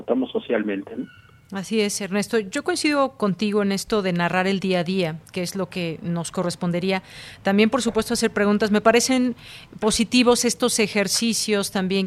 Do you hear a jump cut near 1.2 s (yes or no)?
no